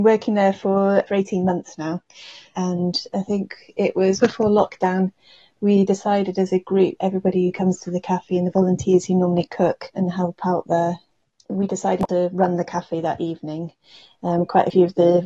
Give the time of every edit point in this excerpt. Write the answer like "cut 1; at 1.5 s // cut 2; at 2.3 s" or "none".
cut 1; at 2.5 s // cut 2; at 4.2 s // cut 3; at 7.0 s

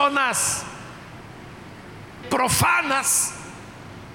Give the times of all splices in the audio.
cut 1; at 2.2 s

